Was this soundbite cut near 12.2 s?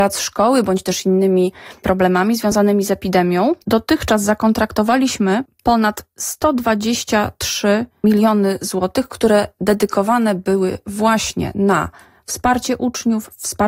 no; 1 cut; at 3.6 s

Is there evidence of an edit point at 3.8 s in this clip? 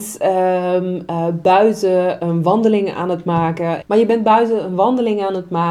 yes; 1 cut; at 3.8 s

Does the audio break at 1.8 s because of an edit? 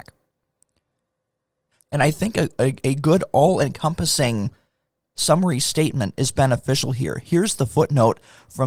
yes; 1 cut; at 1.8 s

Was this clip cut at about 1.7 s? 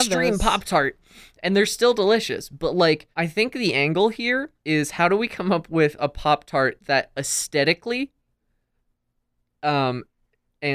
no; 2 cuts; at 3.1 s, 4.6 s

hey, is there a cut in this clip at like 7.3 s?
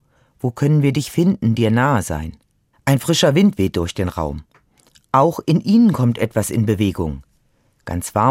no; 1 cut; at 2.7 s

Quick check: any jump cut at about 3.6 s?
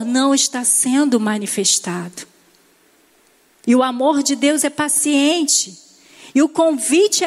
yes; 1 cut; at 3.6 s

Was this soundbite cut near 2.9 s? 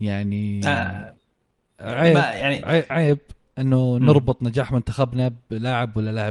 yes; 1 cut; at 2.9 s

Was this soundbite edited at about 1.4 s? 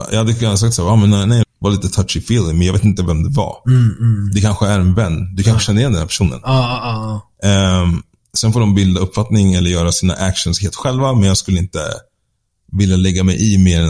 yes; 1 cut; at 1.4 s

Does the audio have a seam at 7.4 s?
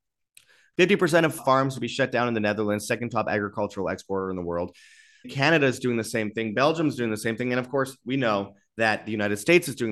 no; 2 cuts; at 1.4 s, 5.2 s

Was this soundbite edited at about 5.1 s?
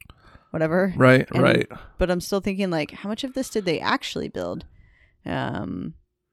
no; 1 cut; at 1.3 s

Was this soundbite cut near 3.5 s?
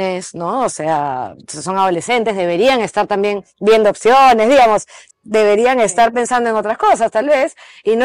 yes; 2 cuts; at 3.5 s, 5.1 s

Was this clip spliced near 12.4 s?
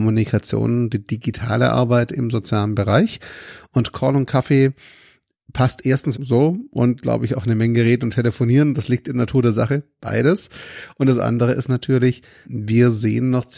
yes; 2 cuts; at 6.1 s, 12.4 s

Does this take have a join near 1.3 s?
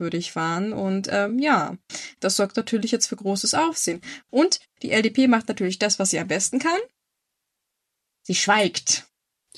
no; 0 cuts

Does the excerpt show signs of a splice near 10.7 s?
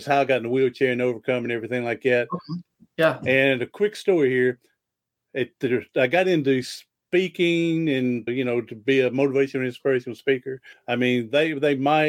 yes; 2 cuts; at 8.3 s, 10.7 s

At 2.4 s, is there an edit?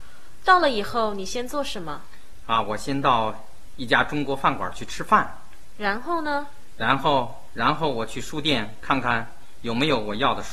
no; 0 cuts

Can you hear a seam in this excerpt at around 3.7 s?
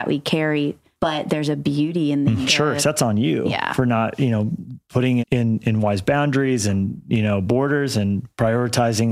no; 2 cuts; at 2.4 s, 5.2 s

